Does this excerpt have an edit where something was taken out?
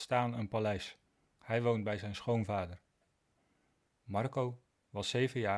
yes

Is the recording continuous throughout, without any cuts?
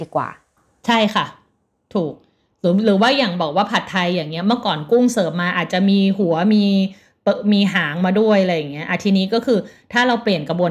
yes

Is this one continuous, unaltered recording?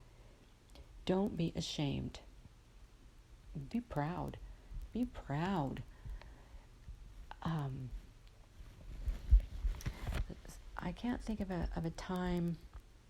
no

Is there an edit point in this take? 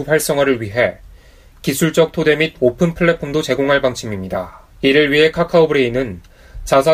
yes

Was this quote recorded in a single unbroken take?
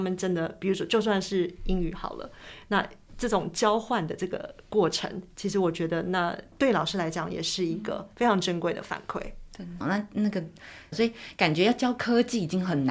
no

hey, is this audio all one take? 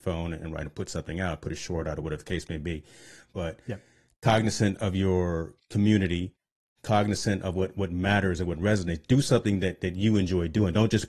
yes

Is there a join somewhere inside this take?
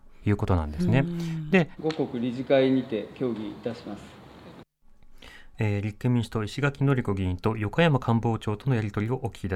yes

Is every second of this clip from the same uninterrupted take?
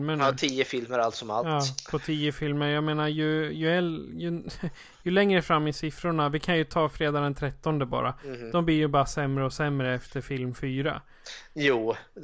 yes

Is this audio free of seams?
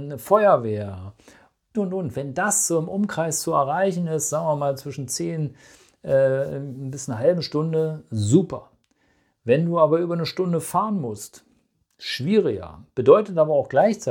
no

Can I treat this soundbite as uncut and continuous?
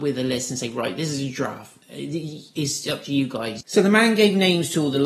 no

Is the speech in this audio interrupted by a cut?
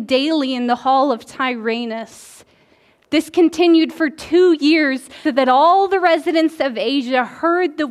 yes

